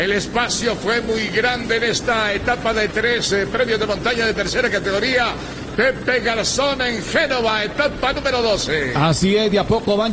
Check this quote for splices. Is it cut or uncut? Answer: uncut